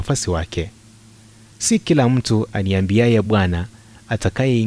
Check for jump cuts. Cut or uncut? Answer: cut